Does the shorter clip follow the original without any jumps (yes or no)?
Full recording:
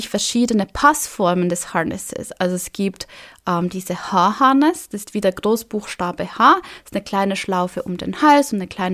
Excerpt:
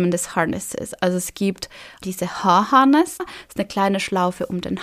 no